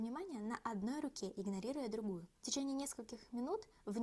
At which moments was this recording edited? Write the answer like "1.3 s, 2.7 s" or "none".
2.4 s